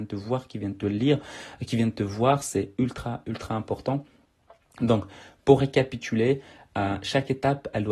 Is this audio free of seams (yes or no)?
yes